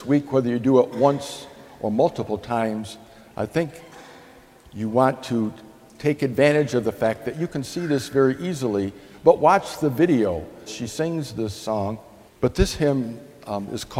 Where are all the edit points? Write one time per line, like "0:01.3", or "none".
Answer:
0:10.7
0:12.3